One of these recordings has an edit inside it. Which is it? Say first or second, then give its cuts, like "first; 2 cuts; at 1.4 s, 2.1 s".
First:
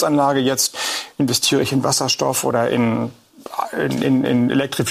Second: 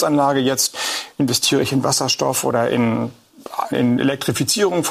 second; 1 cut; at 3.7 s